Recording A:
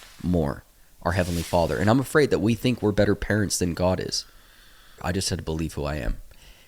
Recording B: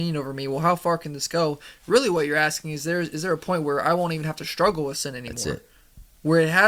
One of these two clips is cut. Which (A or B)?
A